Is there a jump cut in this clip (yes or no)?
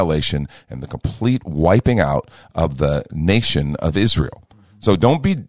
no